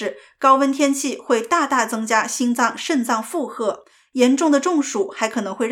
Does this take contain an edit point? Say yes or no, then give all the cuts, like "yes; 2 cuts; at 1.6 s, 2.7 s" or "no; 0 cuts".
no; 0 cuts